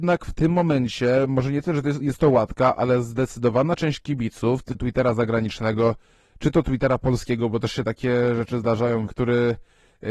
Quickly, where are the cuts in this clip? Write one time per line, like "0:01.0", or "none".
0:04.7
0:09.1